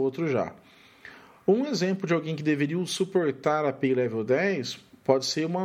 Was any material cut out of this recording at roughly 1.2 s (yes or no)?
no